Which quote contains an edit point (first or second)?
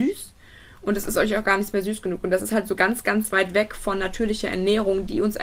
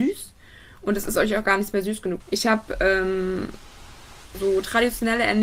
second